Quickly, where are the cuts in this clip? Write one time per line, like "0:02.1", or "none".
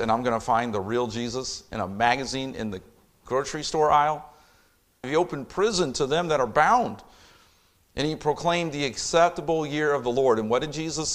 0:05.0

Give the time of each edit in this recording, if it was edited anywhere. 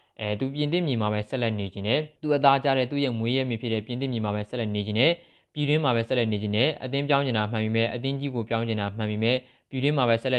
0:02.2

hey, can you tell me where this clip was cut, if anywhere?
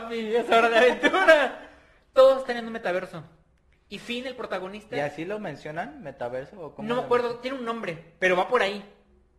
none

